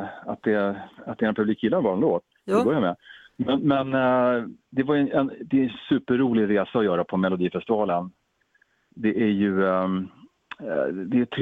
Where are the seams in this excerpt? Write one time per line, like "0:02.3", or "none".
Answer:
none

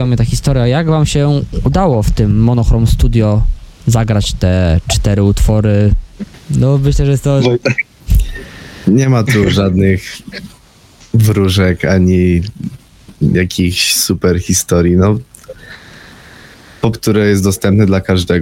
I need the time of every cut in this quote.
0:06.3
0:16.9

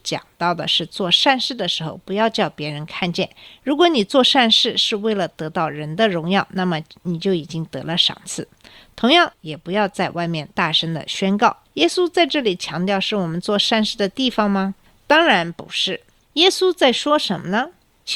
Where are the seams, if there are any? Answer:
0:09.3
0:11.6

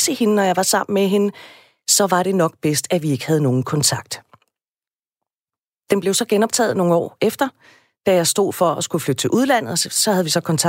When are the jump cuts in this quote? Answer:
none

